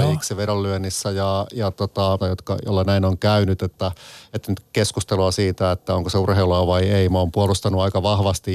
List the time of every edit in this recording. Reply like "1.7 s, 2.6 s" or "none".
2.2 s